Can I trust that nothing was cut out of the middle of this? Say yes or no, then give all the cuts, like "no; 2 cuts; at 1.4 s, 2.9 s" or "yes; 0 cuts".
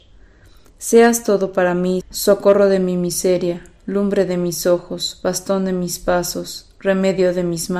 no; 1 cut; at 2.0 s